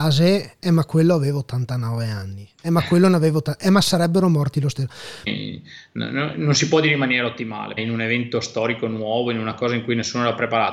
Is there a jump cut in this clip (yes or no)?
yes